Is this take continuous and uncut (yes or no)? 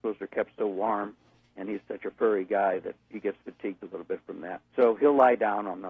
no